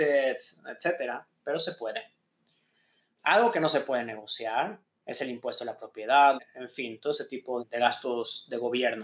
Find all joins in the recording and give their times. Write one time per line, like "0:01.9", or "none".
0:06.4
0:07.6

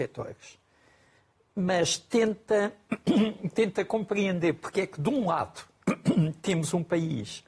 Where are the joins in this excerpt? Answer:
none

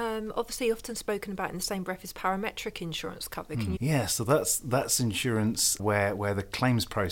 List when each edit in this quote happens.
0:03.8
0:05.8

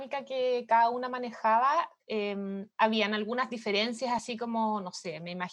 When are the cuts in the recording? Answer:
none

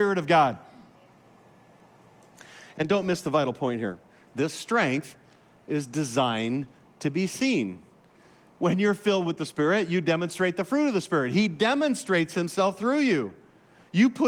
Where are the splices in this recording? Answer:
0:04.3

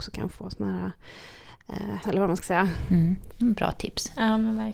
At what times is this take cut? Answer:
0:02.0
0:03.3

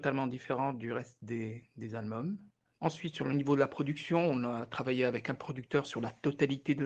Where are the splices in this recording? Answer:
0:02.8

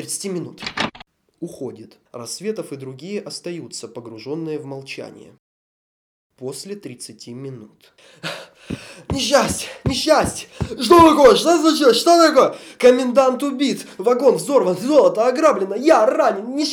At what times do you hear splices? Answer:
none

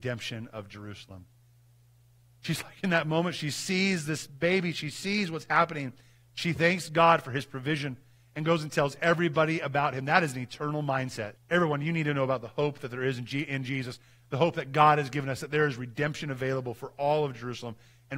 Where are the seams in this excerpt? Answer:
0:11.3

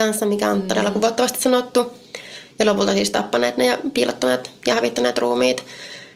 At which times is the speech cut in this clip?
none

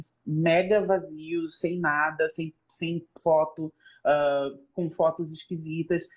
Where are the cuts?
none

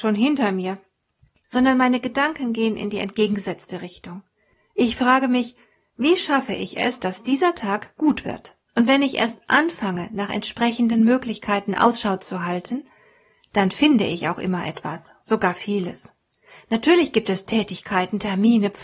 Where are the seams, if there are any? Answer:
0:08.6

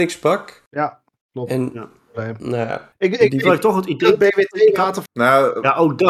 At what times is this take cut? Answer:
0:05.0

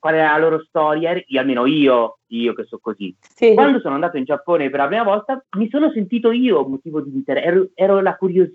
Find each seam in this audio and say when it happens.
none

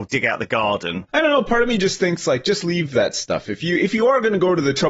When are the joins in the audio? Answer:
0:01.1

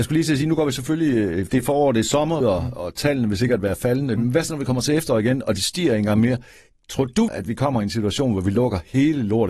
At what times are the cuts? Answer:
0:02.4
0:04.2
0:07.3

